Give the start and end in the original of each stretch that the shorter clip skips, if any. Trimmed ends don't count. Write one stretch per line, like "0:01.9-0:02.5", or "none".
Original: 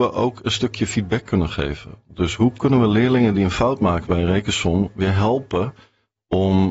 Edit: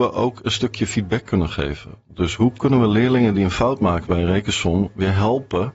none

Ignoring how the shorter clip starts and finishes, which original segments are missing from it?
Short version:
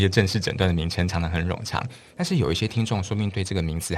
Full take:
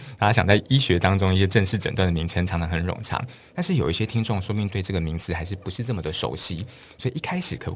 none

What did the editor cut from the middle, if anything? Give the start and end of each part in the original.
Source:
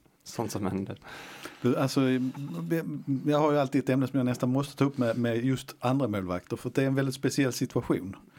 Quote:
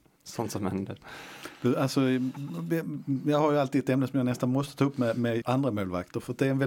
0:05.4-0:05.8

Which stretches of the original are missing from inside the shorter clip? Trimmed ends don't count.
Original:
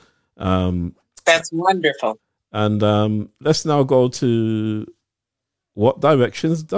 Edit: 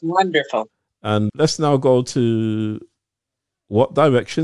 0:02.8-0:03.4

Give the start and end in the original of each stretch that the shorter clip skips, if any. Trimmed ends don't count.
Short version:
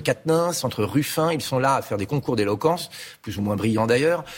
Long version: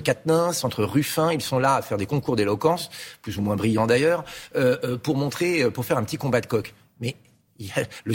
none

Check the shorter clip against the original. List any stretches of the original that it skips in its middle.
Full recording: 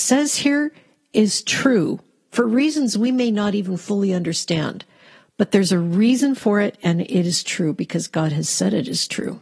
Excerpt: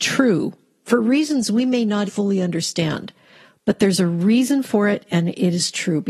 0:03.5-0:03.8

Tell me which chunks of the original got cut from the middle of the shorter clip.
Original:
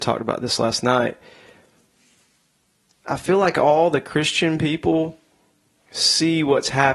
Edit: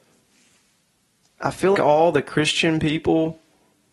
0:03.4-0:03.5

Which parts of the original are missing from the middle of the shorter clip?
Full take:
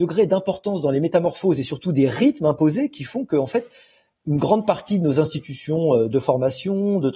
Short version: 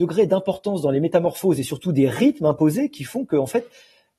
none

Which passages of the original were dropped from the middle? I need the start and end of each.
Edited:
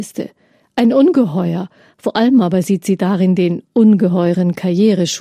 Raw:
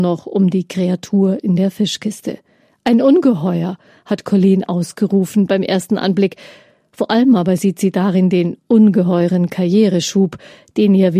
0:04.0-0:06.9

